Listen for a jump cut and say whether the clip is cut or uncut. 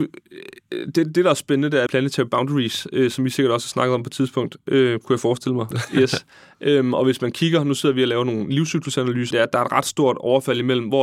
cut